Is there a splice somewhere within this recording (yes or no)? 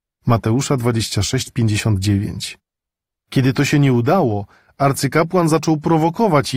no